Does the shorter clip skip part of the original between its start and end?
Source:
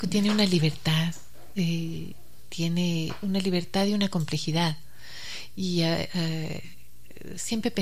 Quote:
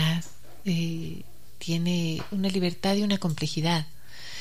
no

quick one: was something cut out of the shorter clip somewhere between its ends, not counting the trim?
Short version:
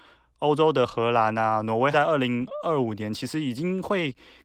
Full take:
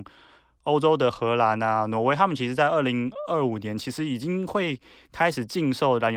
yes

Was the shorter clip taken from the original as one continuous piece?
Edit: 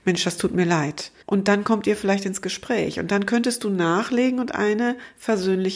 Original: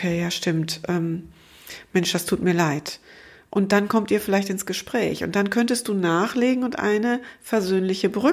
no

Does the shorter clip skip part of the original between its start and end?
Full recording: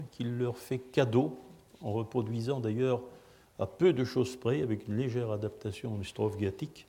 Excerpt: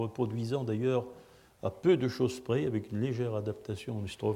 no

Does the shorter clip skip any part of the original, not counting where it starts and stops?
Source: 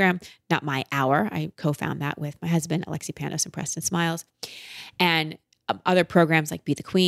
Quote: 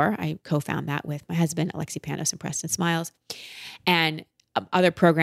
no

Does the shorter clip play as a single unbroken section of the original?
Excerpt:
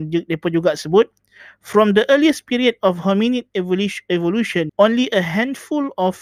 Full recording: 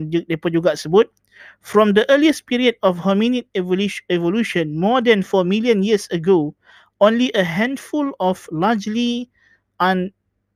no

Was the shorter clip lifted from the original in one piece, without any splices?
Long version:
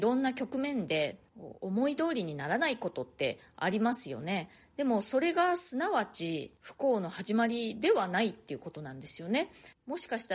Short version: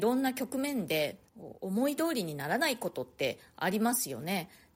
yes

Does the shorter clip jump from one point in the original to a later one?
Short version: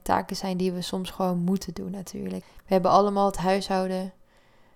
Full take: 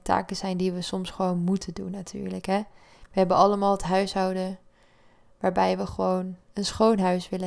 yes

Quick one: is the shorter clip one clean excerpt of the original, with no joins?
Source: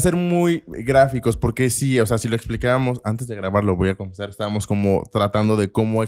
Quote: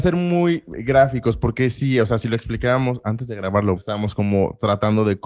no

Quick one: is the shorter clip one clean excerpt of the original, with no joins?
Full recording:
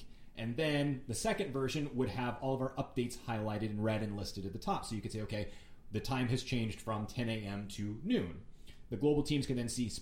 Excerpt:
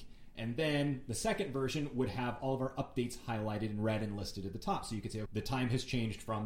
no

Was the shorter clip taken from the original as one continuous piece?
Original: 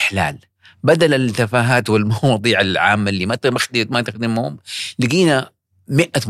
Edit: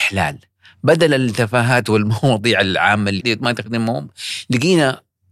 no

